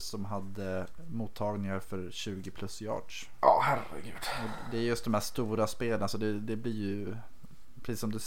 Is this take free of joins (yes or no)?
yes